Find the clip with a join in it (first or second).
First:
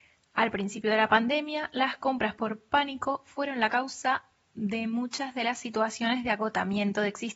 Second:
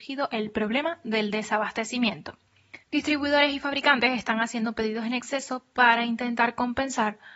second